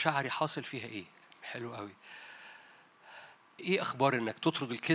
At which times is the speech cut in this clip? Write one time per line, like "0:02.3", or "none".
0:03.6